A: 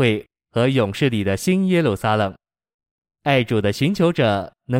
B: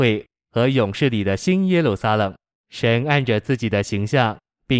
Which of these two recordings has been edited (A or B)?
B